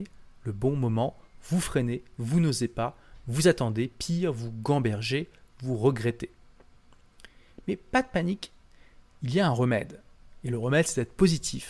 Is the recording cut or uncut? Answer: uncut